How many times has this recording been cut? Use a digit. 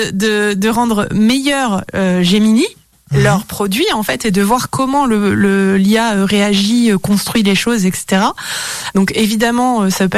1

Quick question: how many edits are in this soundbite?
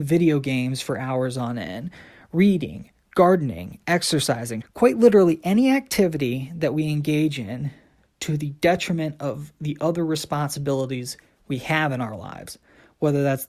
1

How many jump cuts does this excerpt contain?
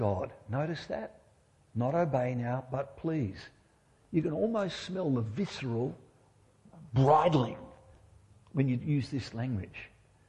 0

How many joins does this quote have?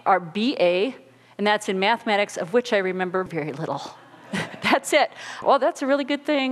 2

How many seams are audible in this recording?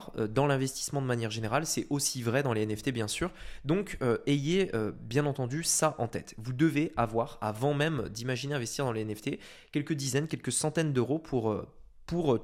0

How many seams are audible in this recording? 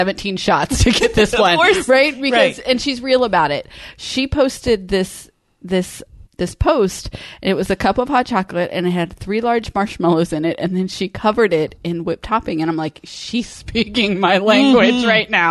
2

